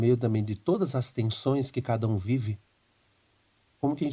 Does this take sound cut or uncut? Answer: uncut